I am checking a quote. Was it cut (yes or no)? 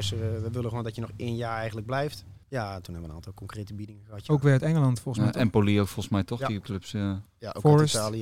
yes